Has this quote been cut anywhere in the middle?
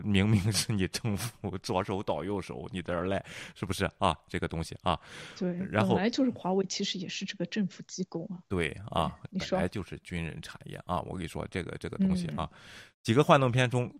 yes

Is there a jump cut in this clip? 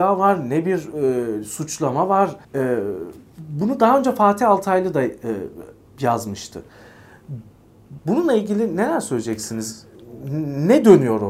yes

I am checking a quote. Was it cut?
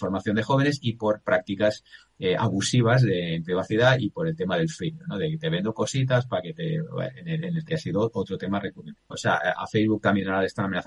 yes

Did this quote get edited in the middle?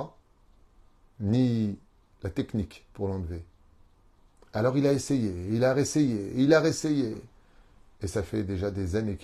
no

